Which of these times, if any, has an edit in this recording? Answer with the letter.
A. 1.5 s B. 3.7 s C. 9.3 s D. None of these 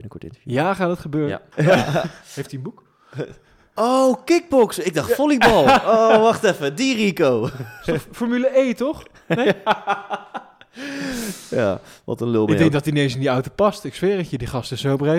A